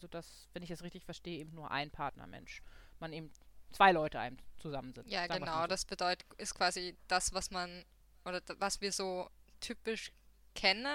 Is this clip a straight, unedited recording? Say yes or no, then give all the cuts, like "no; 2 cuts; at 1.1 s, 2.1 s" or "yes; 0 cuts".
yes; 0 cuts